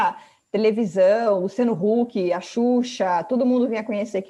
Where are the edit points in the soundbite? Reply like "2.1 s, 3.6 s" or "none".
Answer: none